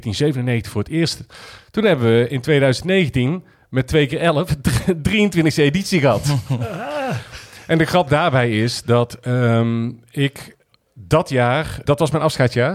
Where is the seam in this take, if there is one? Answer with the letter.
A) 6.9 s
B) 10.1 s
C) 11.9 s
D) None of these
C